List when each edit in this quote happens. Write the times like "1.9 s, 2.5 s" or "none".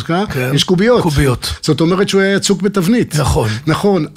none